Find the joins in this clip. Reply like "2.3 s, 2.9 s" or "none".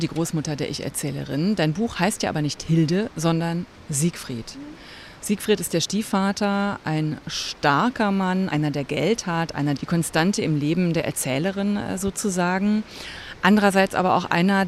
8.5 s, 9.8 s